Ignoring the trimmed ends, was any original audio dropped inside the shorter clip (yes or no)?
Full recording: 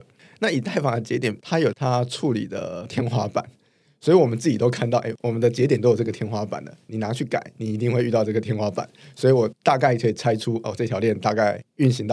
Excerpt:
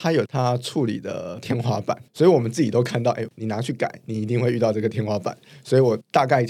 yes